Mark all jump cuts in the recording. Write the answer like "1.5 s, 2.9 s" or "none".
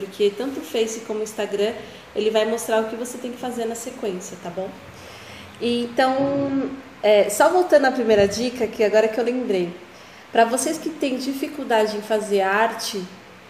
none